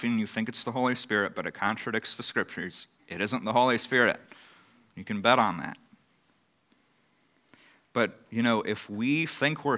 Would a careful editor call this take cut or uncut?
uncut